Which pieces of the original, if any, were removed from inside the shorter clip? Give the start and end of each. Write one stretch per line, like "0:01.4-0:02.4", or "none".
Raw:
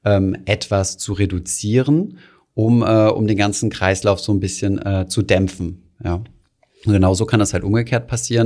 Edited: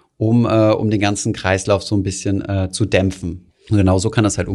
0:05.9-0:06.6